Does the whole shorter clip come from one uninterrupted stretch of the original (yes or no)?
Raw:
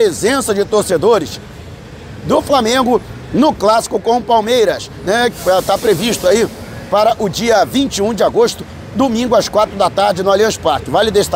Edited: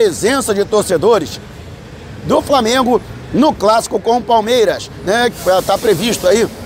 yes